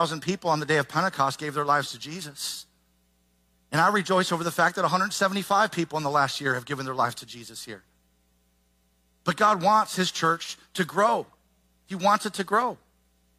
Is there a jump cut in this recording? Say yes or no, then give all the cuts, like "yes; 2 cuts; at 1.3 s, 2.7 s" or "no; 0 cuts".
no; 0 cuts